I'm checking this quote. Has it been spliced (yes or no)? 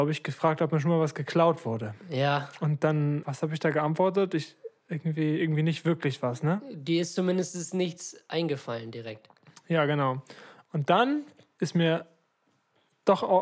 yes